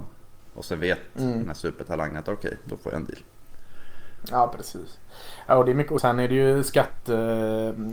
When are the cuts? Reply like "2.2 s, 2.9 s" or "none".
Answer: 6.0 s